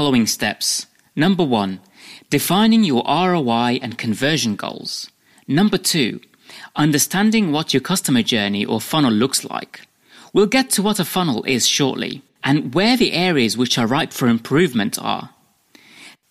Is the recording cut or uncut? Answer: uncut